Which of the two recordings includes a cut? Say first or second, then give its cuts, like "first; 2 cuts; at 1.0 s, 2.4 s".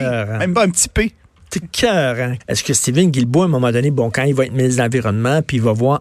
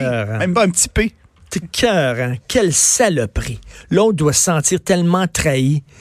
first; 1 cut; at 2.4 s